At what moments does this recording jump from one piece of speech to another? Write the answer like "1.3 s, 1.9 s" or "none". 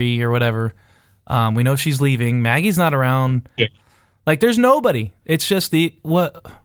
3.6 s

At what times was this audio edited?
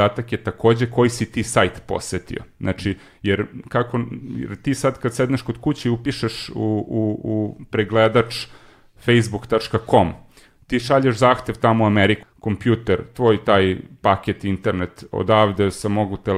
12.2 s

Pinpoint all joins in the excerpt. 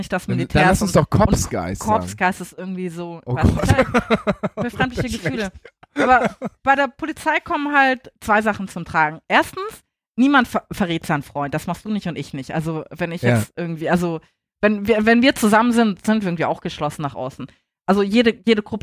none

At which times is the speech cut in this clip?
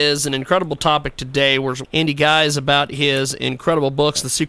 1.8 s

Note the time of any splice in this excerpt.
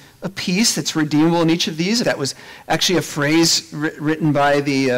2.0 s

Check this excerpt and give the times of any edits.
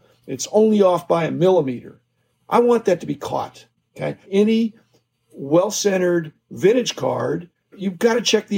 none

